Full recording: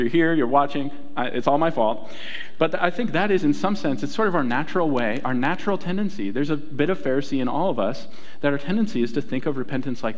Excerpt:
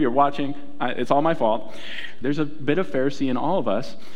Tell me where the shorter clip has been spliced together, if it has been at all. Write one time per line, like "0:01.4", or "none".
0:02.2